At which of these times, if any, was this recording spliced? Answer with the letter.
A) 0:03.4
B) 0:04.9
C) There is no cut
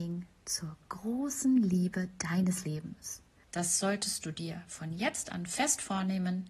A